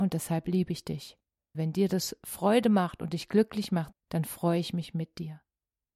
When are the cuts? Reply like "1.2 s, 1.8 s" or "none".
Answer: 1.5 s, 3.9 s